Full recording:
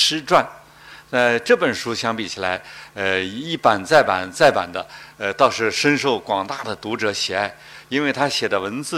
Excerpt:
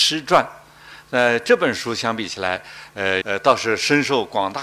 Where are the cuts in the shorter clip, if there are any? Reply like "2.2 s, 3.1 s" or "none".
3.2 s